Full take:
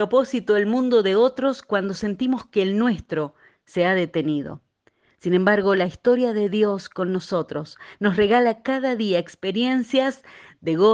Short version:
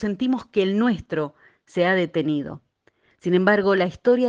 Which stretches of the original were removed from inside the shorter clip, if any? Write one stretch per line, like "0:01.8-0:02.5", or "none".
none